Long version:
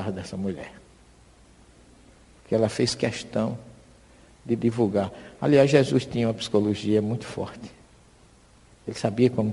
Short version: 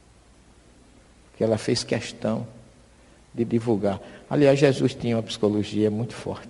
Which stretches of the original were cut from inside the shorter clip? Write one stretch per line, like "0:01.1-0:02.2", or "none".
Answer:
none